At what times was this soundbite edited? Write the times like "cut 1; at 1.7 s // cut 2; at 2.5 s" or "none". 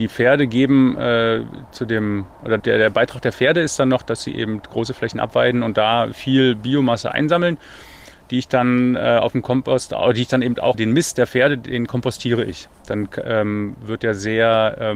cut 1; at 2.6 s // cut 2; at 10.7 s

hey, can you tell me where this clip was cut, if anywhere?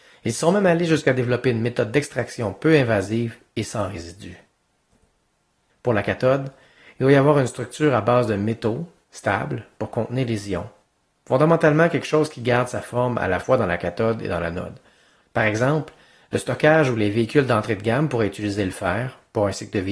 cut 1; at 5.7 s // cut 2; at 15.2 s

